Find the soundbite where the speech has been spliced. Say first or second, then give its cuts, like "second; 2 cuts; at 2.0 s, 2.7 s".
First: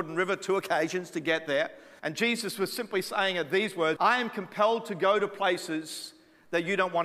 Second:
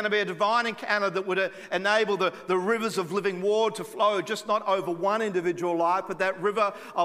first; 2 cuts; at 2.0 s, 4.0 s